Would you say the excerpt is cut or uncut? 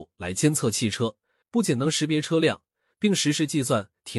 cut